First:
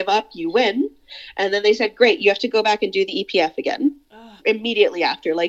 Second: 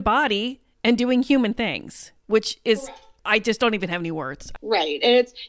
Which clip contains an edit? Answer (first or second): first